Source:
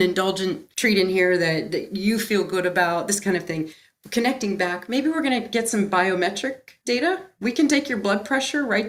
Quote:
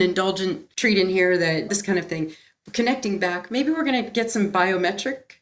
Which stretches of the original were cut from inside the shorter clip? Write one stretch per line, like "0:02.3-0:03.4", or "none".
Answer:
0:01.7-0:03.1